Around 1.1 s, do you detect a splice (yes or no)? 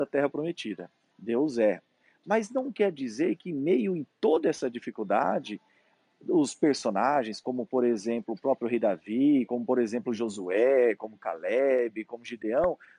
yes